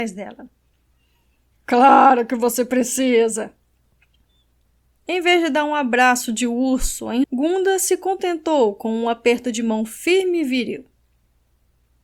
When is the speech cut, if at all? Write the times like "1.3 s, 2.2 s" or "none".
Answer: 1.5 s, 7.2 s